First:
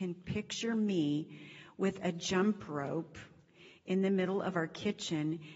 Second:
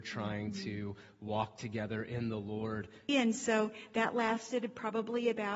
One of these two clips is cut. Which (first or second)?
second